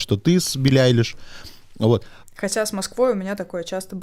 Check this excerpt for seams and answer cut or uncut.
cut